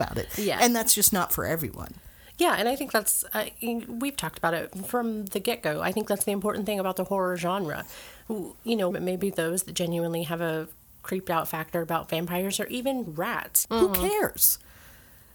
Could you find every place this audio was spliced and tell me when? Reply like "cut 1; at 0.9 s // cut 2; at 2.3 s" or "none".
cut 1; at 8.9 s // cut 2; at 13.6 s